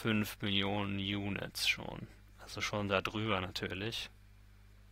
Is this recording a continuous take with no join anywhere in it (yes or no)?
yes